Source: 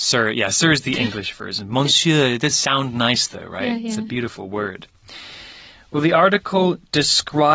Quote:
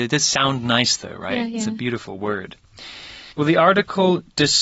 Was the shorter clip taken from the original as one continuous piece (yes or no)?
no